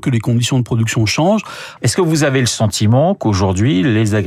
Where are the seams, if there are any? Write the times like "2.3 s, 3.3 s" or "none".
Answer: 1.8 s